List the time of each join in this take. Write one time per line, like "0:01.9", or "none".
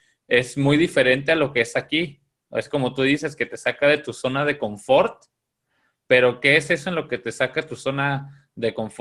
none